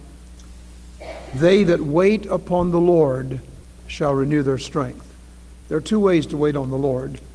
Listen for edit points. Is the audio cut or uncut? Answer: uncut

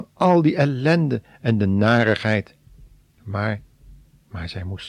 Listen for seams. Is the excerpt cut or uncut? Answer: uncut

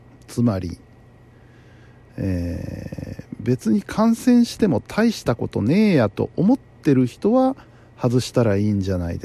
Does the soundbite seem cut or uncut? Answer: uncut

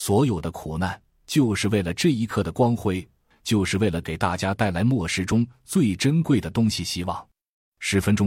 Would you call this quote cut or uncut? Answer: cut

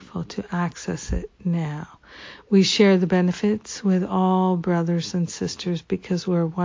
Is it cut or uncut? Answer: uncut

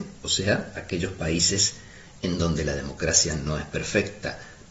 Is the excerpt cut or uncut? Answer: uncut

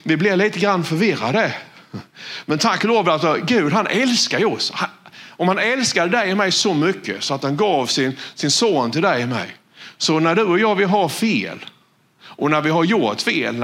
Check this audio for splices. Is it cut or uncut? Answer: uncut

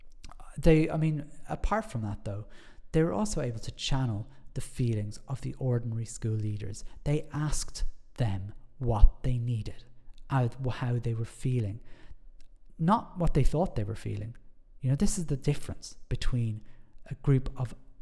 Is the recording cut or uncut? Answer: uncut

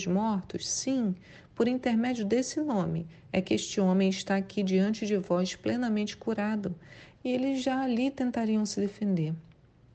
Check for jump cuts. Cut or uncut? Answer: cut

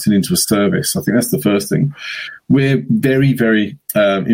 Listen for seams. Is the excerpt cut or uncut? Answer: uncut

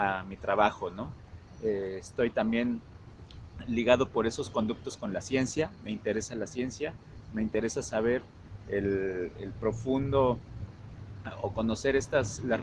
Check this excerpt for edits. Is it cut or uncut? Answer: uncut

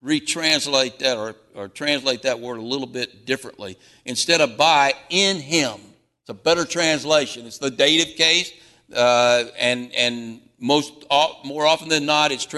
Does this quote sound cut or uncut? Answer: uncut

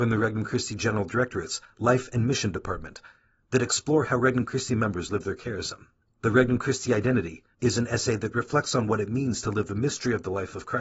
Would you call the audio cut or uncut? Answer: cut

